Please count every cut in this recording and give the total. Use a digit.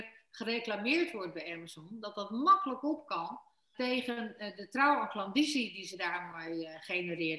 1